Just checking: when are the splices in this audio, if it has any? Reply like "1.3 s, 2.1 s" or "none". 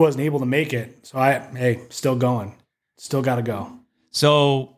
none